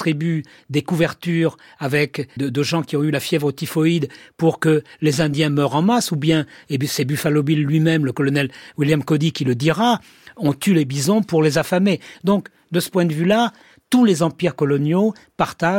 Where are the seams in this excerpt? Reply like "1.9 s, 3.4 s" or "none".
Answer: 2.4 s

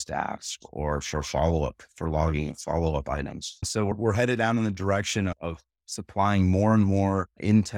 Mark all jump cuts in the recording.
none

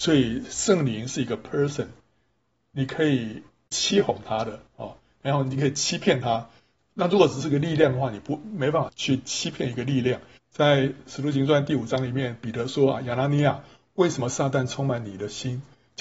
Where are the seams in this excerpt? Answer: 8.9 s, 10.4 s

